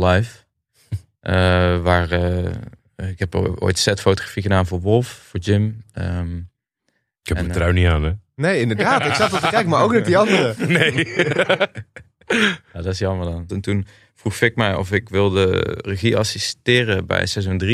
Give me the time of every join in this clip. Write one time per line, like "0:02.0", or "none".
0:13.5